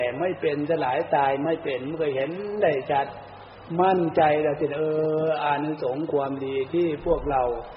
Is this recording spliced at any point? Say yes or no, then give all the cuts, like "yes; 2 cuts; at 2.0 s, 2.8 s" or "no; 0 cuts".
no; 0 cuts